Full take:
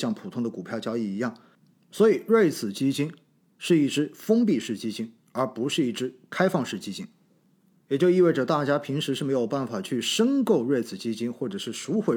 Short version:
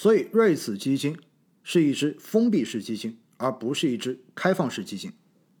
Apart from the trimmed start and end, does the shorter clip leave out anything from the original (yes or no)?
no